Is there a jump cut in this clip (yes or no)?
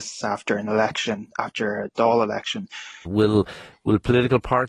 yes